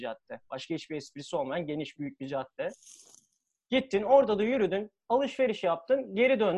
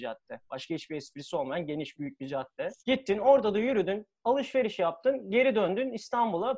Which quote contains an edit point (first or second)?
second